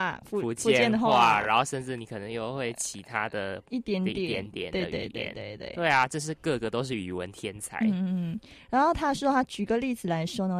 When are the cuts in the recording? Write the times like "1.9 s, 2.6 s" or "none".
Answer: none